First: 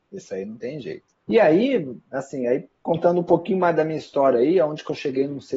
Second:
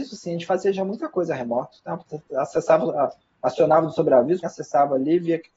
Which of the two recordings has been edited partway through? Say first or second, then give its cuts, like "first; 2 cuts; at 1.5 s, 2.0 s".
second; 1 cut; at 4.4 s